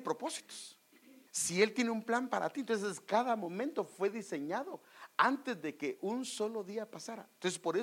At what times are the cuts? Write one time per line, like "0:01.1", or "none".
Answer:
0:01.3